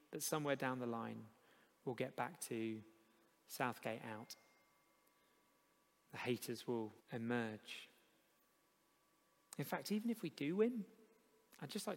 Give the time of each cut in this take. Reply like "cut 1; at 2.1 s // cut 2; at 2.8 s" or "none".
cut 1; at 7.0 s